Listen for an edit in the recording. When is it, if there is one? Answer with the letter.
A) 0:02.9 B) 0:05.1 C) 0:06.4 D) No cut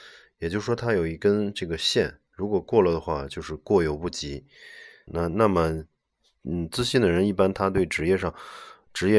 B